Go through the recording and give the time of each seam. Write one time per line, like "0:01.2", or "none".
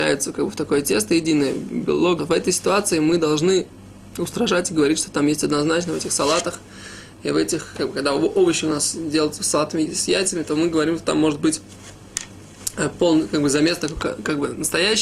0:02.2
0:07.7